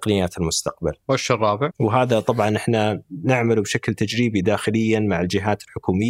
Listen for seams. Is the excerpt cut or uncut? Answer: cut